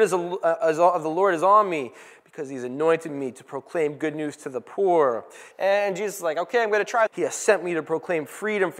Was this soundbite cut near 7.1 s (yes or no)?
yes